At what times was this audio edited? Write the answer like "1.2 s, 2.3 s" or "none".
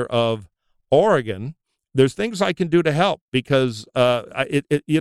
none

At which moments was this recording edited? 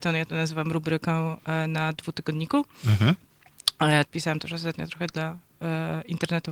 4.1 s

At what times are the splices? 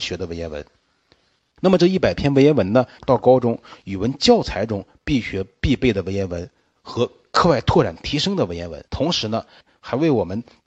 1.4 s, 3.0 s, 8.9 s

